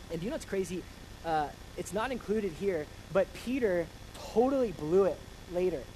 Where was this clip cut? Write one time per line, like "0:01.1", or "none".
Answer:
none